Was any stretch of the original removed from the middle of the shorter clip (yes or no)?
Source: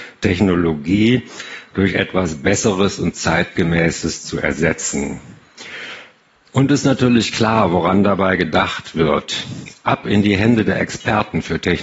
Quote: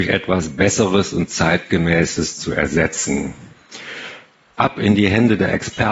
yes